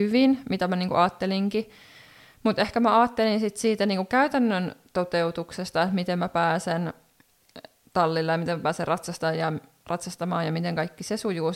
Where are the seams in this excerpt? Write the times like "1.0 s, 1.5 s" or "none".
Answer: none